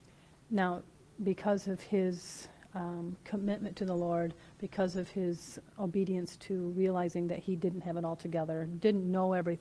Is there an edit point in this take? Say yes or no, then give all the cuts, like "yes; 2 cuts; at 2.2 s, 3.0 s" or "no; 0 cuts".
no; 0 cuts